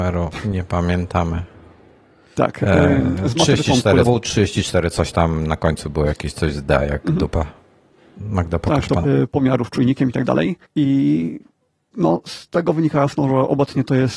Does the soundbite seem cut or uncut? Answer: cut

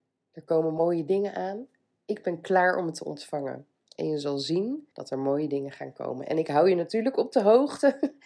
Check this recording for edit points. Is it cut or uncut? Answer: cut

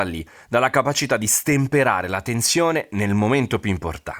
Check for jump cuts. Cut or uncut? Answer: uncut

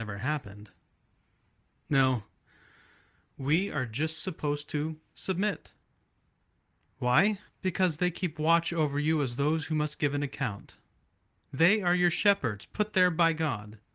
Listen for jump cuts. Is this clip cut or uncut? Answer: cut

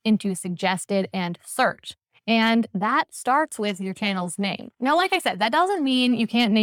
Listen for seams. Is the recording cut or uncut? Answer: uncut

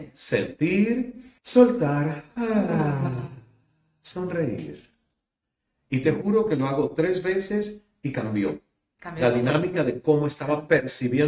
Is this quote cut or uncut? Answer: cut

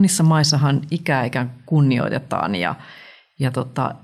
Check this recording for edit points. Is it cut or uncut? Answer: uncut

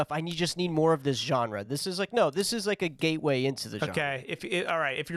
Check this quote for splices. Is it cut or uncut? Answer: uncut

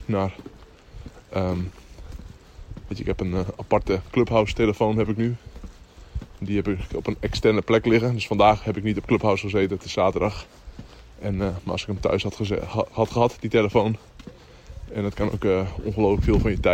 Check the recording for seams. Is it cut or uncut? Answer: cut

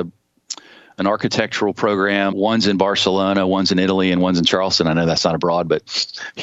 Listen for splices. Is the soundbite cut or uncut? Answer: cut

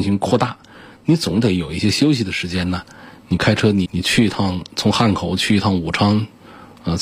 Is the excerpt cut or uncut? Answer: cut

